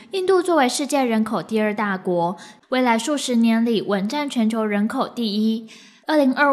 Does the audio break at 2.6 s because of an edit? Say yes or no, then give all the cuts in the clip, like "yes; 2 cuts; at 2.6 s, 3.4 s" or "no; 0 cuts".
yes; 1 cut; at 2.6 s